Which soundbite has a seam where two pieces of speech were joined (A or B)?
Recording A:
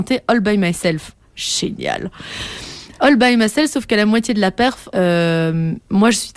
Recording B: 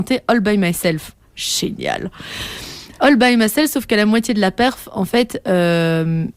A